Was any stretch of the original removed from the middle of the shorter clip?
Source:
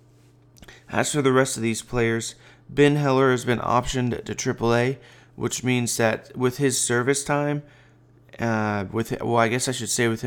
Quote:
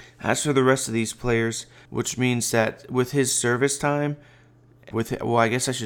yes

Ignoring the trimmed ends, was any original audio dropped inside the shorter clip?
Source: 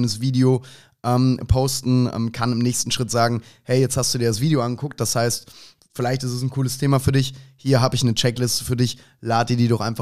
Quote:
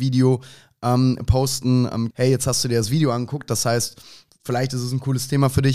yes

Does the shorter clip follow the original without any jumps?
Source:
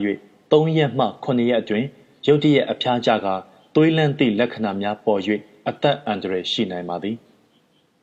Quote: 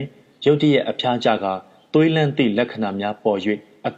yes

